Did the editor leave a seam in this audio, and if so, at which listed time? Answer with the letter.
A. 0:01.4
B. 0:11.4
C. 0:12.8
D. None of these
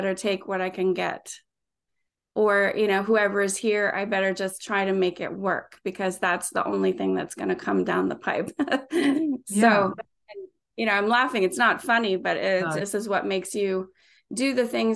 C